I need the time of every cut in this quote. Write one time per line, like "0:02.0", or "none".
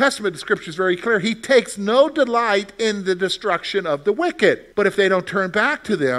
0:04.7